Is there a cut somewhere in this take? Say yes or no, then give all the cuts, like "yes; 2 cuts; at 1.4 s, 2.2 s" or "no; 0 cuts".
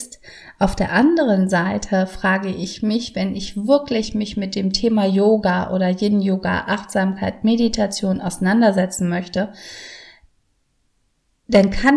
no; 0 cuts